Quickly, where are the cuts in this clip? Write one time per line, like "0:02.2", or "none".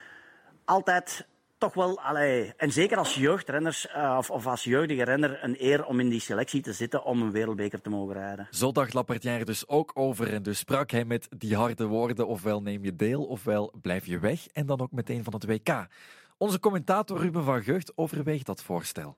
none